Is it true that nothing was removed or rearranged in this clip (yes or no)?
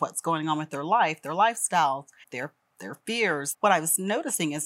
no